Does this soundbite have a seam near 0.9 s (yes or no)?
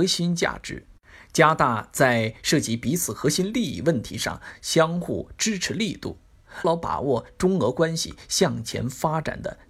no